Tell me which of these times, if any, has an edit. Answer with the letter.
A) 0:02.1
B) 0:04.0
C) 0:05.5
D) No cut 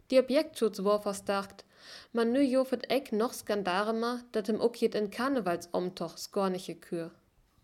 D